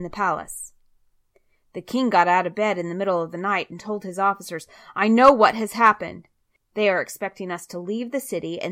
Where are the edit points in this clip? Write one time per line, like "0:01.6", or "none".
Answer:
0:06.6